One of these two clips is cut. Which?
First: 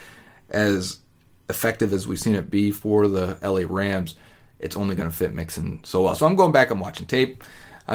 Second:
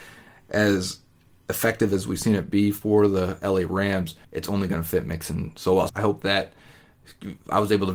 second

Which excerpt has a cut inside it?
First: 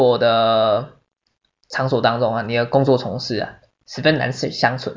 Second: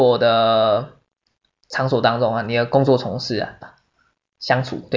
second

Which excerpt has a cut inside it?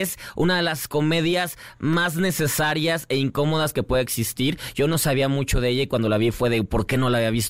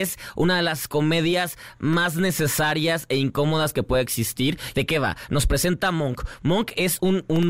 second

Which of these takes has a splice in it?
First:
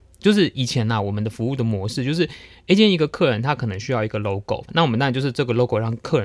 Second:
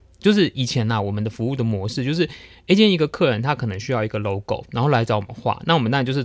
first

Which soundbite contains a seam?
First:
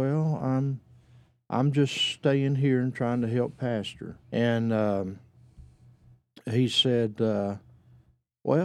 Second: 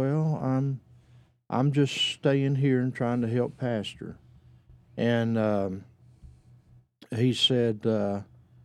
first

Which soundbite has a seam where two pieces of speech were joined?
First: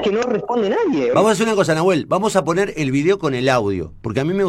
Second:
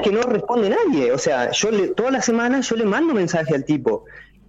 first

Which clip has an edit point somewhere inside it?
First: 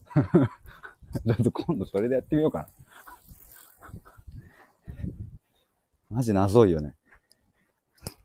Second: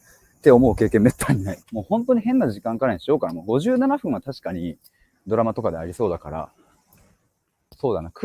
second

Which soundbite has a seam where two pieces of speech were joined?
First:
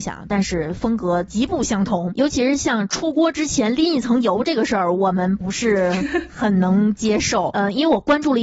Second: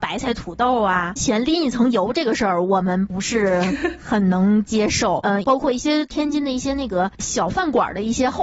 second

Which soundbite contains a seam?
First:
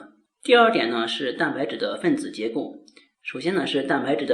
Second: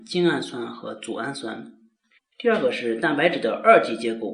second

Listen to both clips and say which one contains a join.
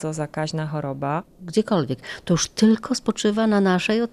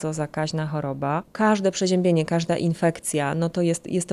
first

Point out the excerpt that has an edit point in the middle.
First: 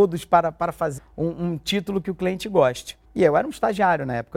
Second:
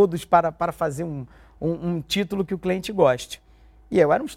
first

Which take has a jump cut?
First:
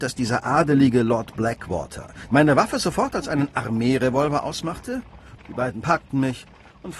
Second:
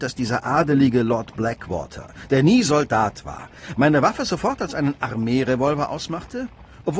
first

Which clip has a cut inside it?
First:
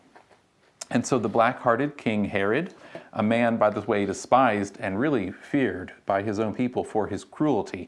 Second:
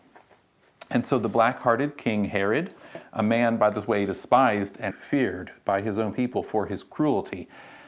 second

